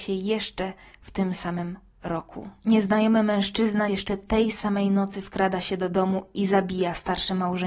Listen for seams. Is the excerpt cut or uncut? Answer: cut